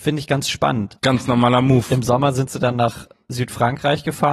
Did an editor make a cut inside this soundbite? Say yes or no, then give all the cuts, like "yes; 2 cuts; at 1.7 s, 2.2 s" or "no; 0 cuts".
yes; 1 cut; at 1.0 s